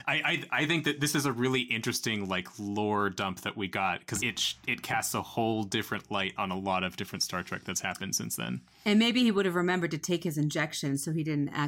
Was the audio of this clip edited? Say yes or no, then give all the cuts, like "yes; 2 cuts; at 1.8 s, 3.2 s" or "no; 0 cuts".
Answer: yes; 1 cut; at 4.2 s